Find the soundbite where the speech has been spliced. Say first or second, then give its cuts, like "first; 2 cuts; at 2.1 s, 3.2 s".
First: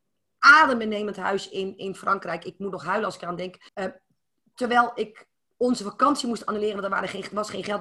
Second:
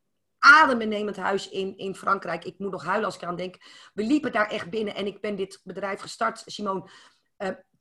first; 1 cut; at 3.7 s